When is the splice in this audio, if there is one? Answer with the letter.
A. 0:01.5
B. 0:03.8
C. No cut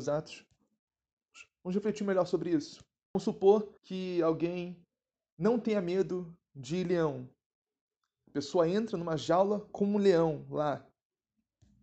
B